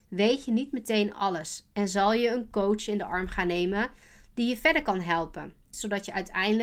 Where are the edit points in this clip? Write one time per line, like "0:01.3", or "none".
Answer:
0:05.7